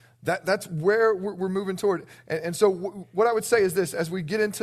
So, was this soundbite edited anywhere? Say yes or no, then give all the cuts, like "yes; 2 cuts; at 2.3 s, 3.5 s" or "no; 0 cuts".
no; 0 cuts